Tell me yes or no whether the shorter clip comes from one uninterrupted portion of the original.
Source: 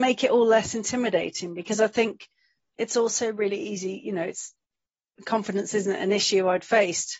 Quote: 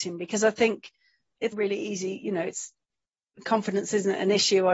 no